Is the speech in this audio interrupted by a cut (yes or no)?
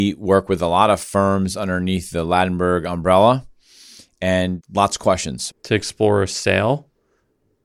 yes